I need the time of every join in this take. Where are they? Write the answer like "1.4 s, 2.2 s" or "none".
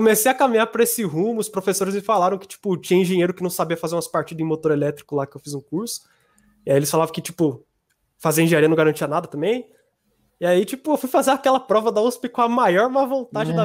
none